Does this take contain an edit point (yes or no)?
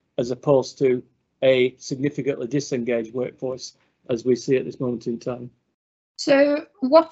no